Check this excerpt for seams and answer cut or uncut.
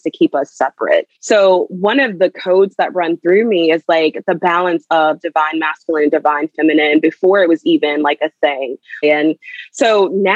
cut